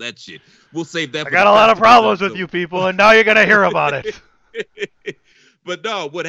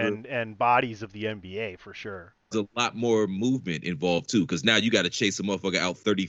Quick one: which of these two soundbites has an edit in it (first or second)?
second